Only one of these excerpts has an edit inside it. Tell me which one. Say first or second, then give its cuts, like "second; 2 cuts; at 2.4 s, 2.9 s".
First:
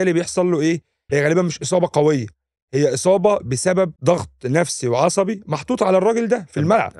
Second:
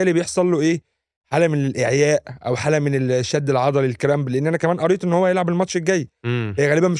first; 2 cuts; at 1.1 s, 4.0 s